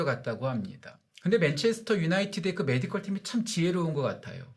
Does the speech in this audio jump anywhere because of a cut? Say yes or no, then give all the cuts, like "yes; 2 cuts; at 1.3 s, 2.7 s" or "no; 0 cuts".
yes; 1 cut; at 1.1 s